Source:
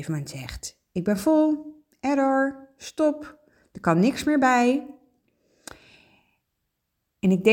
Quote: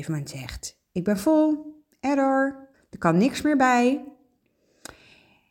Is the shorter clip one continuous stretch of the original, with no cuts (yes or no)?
no